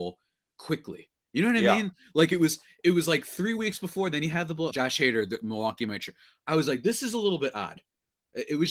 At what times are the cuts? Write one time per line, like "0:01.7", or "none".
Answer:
0:04.7